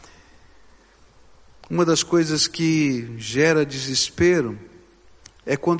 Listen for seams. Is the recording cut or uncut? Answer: uncut